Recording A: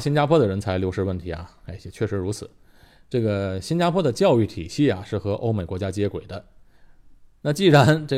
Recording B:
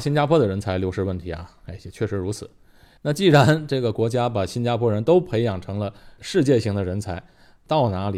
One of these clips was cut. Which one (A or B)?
B